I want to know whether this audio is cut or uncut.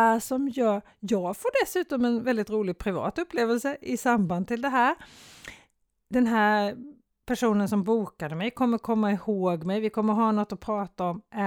uncut